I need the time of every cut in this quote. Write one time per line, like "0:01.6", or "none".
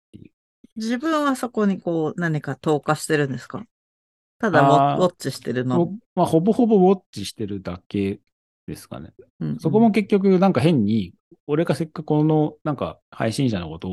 none